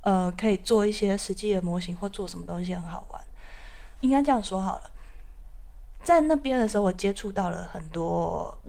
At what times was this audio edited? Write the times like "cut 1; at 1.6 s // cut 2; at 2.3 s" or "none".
cut 1; at 4.0 s